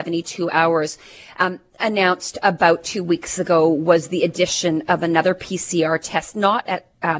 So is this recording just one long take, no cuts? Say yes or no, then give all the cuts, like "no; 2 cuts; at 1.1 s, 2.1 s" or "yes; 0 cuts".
yes; 0 cuts